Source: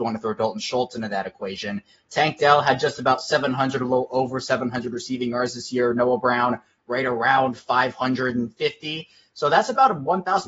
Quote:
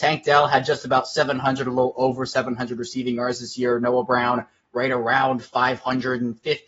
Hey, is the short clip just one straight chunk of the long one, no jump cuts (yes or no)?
yes